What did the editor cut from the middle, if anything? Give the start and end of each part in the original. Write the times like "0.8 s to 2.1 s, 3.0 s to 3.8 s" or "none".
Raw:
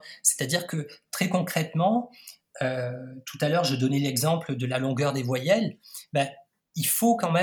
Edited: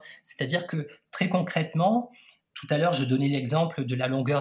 2.5 s to 3.2 s